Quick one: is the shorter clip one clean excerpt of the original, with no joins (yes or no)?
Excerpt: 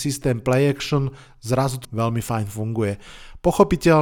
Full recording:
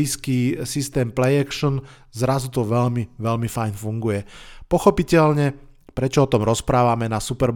no